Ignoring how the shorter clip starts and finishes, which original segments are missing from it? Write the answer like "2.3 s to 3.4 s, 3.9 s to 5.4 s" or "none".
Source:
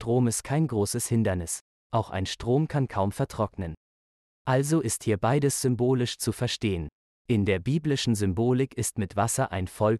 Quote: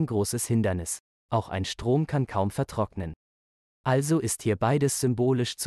none